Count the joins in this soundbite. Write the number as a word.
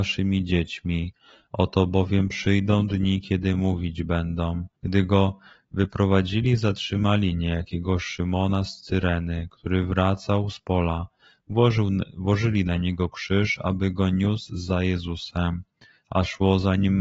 one